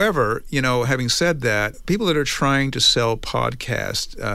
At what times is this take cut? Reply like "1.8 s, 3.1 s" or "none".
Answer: none